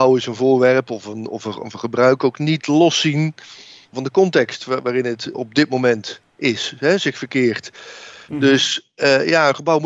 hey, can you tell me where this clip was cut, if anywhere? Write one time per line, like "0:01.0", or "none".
0:05.3